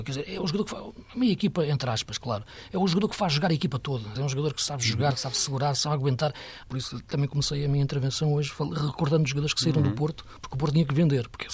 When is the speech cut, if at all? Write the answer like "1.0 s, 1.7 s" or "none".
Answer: 4.2 s, 6.6 s